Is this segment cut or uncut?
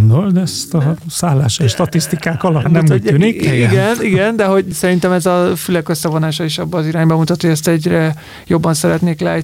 cut